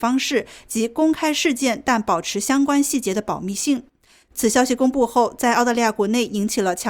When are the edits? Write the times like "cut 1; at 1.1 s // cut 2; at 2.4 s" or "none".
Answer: cut 1; at 4.2 s